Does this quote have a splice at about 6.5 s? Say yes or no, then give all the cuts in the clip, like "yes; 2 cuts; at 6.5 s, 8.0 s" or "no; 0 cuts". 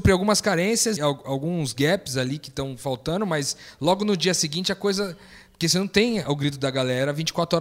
no; 1 cut; at 1.0 s